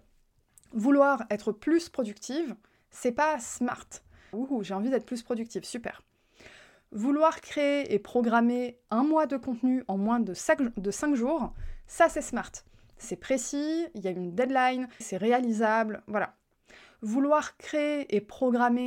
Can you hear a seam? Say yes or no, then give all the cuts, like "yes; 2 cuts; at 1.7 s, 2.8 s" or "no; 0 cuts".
yes; 2 cuts; at 4.3 s, 15.0 s